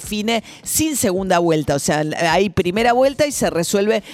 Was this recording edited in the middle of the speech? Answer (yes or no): no